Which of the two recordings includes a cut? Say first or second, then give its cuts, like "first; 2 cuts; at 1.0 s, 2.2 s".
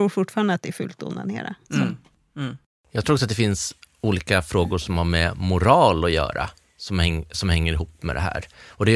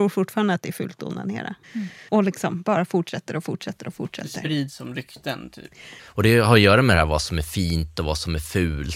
second; 2 cuts; at 1.6 s, 6.0 s